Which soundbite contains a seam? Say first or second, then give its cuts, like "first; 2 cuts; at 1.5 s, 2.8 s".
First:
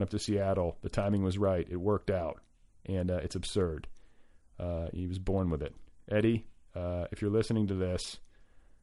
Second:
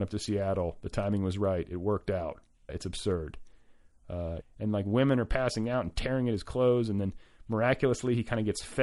second; 2 cuts; at 2.7 s, 4.4 s